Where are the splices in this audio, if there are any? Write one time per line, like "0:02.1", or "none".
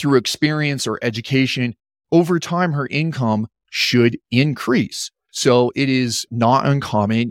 0:06.3